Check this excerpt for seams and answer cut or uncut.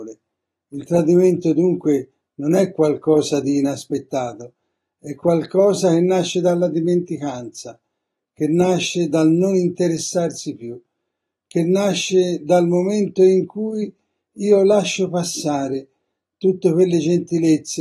uncut